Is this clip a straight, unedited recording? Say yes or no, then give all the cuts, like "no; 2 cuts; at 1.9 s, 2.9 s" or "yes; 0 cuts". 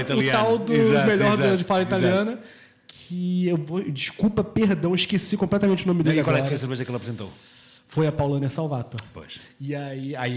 yes; 0 cuts